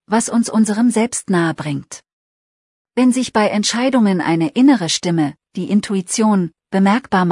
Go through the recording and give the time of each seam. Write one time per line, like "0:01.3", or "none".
none